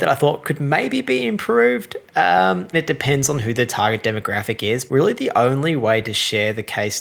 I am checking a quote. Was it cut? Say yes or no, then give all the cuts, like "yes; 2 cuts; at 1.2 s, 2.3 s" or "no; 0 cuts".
yes; 2 cuts; at 2.7 s, 4.9 s